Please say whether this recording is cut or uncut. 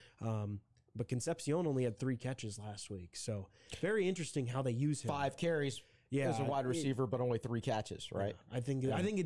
uncut